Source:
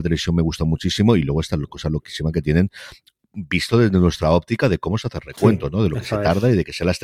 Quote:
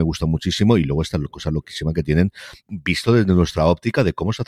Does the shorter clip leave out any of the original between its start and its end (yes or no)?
yes